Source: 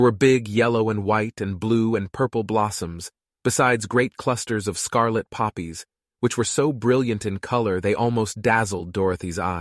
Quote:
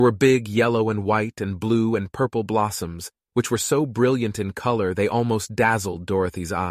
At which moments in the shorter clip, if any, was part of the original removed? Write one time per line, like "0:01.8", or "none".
0:03.3